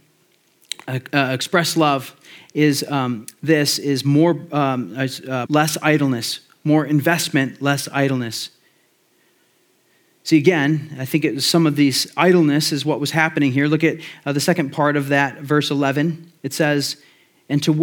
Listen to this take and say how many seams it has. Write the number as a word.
two